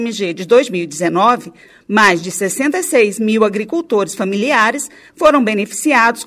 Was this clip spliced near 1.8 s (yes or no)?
no